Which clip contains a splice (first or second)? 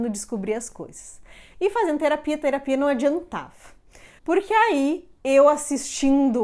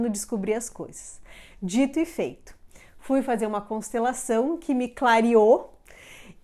first